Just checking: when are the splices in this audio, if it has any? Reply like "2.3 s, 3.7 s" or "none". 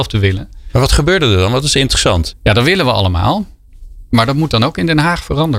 2.3 s